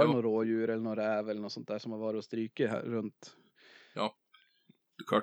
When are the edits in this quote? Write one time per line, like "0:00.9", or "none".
none